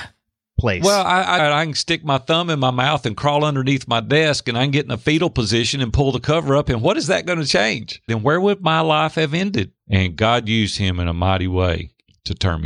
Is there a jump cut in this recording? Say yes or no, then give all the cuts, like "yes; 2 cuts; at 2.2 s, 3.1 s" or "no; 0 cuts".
yes; 3 cuts; at 1.4 s, 8.1 s, 9.8 s